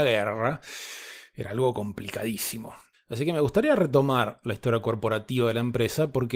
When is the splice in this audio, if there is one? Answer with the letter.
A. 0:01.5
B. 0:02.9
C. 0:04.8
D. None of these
B